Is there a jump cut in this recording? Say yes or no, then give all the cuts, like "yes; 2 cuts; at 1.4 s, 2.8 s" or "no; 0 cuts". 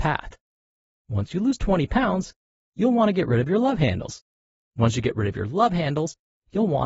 no; 0 cuts